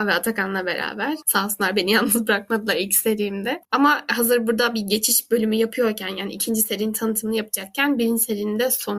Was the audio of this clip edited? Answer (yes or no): yes